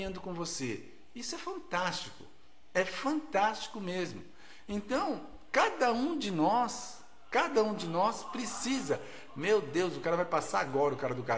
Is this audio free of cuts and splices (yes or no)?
yes